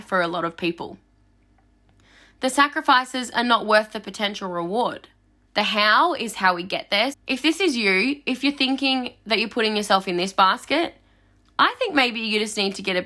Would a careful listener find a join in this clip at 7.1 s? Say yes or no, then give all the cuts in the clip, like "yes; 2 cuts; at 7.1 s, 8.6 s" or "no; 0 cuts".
yes; 2 cuts; at 5.5 s, 7.1 s